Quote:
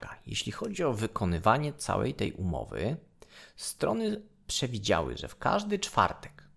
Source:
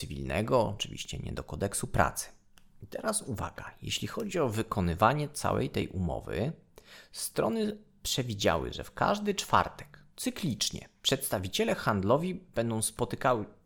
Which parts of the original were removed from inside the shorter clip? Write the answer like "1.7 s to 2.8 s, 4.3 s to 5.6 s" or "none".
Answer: none